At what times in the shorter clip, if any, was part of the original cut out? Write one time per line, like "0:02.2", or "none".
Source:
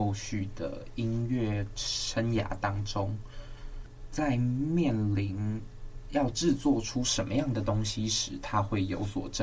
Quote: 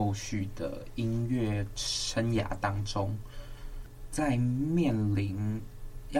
none

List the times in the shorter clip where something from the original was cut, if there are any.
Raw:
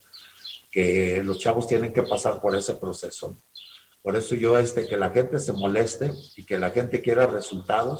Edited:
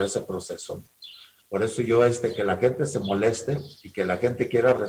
none

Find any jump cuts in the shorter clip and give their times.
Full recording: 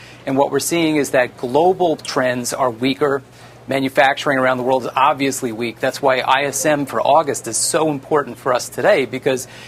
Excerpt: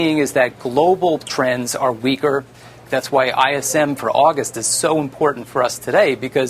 0:02.8

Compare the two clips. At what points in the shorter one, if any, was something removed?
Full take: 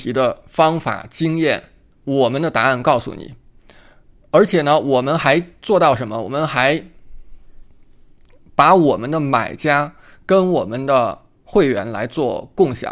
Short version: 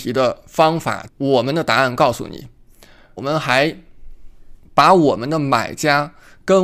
0:01.1
0:03.2
0:04.6

